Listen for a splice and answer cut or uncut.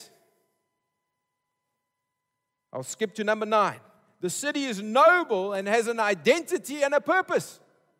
uncut